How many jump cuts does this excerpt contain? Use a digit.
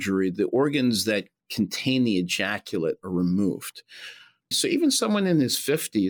1